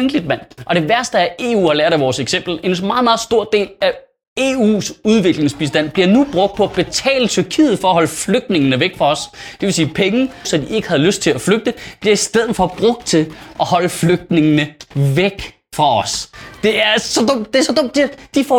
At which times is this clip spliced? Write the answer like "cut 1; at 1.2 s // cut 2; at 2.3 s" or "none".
cut 1; at 10.4 s